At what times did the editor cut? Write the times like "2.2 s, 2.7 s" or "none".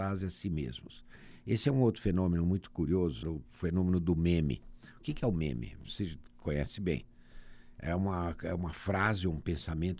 3.2 s